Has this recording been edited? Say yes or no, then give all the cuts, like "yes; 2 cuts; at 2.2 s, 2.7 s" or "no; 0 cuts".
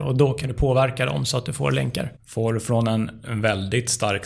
yes; 1 cut; at 2.2 s